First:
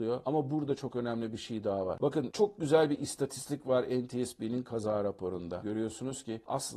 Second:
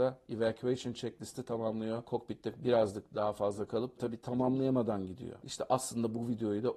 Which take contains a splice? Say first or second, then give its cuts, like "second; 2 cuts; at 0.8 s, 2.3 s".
second; 2 cuts; at 4.0 s, 5.4 s